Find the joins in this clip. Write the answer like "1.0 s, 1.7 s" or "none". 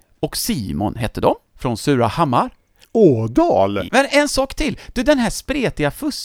3.9 s